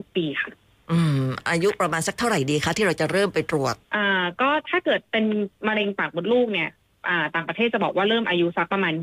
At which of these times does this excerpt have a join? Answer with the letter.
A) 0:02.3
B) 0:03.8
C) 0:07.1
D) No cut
B